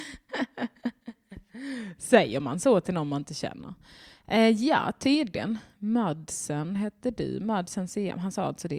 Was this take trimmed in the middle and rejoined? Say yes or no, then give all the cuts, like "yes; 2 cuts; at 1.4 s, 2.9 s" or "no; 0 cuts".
no; 0 cuts